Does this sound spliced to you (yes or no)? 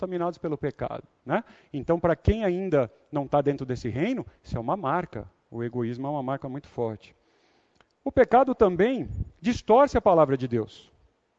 no